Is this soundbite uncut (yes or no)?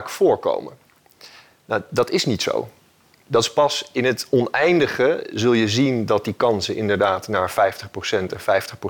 yes